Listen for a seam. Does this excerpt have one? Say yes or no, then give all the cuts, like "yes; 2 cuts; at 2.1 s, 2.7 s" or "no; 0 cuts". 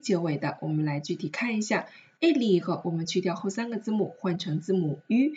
no; 0 cuts